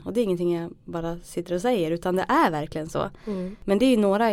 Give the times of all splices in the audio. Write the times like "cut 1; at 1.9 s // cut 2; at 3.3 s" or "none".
none